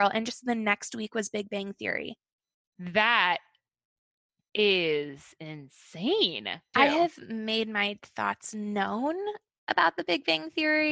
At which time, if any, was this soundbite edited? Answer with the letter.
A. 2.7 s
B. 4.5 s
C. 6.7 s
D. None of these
C